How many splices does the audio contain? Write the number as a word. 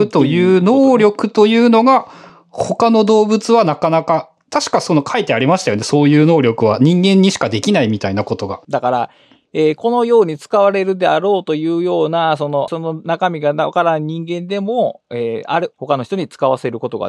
three